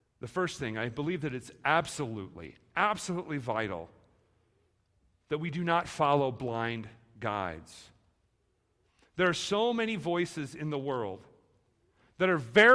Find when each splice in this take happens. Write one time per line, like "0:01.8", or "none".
none